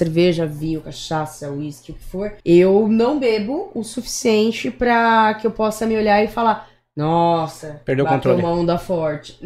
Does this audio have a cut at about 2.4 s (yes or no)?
yes